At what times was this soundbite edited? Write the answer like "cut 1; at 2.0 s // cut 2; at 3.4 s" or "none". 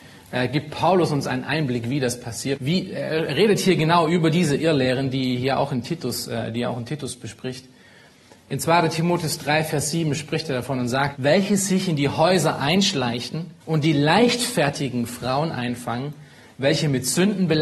cut 1; at 2.6 s // cut 2; at 11.1 s // cut 3; at 13.6 s